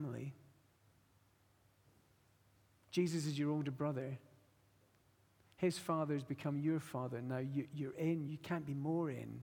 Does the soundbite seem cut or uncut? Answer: uncut